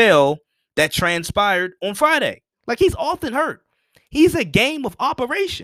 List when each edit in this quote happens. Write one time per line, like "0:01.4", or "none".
0:02.5

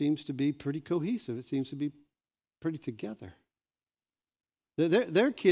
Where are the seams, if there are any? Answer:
none

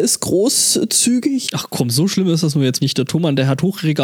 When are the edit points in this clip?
0:01.5
0:02.8

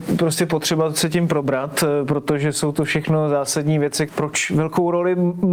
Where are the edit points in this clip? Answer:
0:04.1

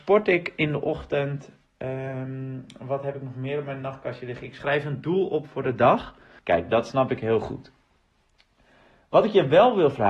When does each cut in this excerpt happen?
0:06.4

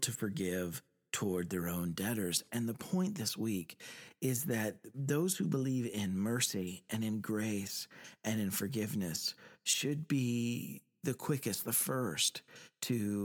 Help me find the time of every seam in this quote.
none

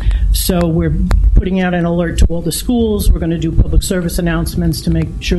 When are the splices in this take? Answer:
none

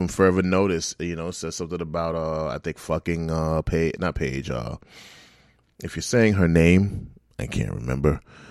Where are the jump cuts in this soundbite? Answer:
none

